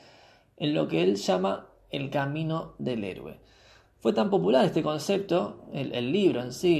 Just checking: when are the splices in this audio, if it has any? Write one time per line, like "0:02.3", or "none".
none